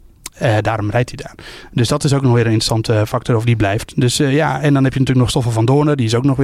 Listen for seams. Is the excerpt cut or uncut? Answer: uncut